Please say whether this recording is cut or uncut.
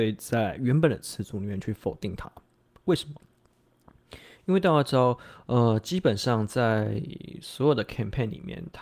uncut